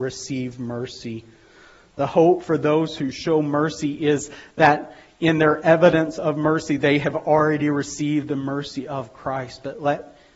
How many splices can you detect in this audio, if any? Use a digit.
0